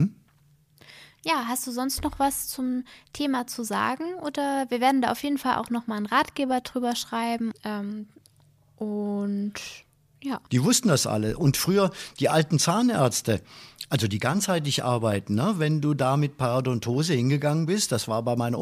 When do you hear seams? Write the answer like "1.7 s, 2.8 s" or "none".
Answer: 7.5 s, 10.5 s